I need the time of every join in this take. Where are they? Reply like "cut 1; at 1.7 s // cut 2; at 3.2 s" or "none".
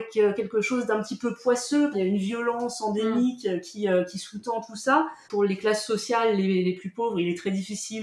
cut 1; at 1.9 s // cut 2; at 5.2 s